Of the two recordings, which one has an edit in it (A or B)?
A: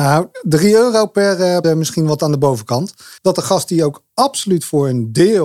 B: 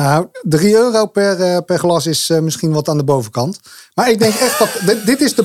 A